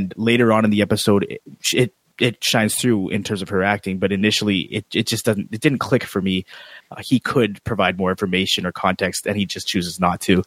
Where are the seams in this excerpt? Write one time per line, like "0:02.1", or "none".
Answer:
0:06.8